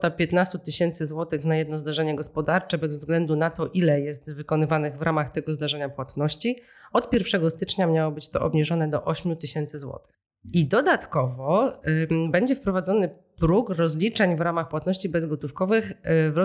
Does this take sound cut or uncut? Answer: uncut